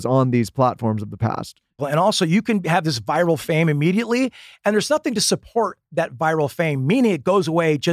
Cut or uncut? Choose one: cut